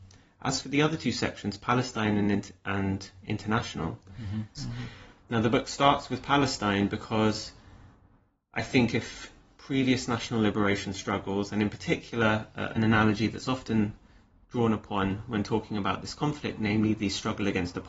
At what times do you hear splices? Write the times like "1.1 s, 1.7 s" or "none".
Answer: 4.6 s, 12.8 s